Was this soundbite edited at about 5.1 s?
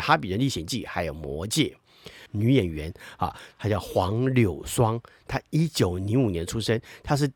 no; 1 cut; at 2.3 s

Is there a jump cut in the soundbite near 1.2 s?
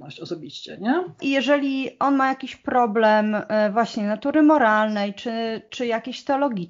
yes; 1 cut; at 1.2 s

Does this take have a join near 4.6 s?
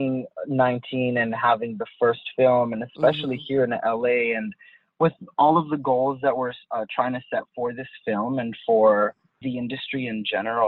no; 1 cut; at 9.4 s

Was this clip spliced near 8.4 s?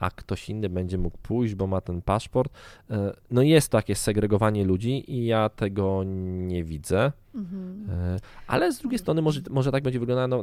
no; 1 cut; at 3.2 s

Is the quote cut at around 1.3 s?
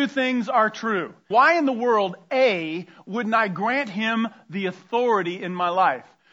yes; 1 cut; at 1.3 s

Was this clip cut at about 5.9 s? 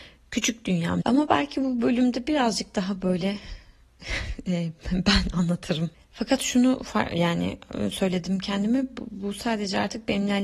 yes; 2 cuts; at 1.0 s, 5.9 s

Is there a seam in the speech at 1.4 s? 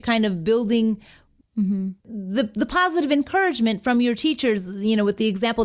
yes; 1 cut; at 1.4 s

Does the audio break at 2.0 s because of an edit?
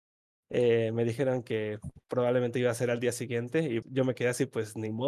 yes; 2 cuts; at 2.0 s, 3.8 s

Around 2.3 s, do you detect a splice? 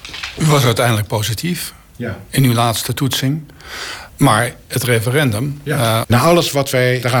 no; 2 cuts; at 4.1 s, 6.0 s

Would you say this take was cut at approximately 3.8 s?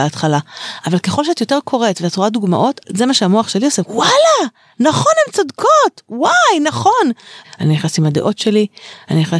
yes; 2 cuts; at 3.8 s, 7.4 s

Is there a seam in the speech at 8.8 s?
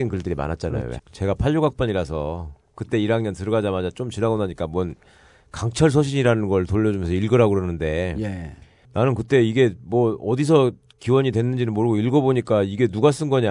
no; 1 cut; at 1.0 s

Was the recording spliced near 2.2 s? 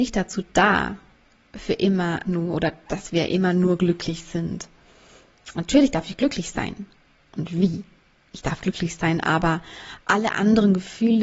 yes; 1 cut; at 2.2 s

